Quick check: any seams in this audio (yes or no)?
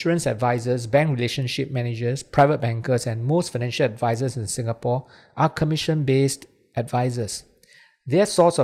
no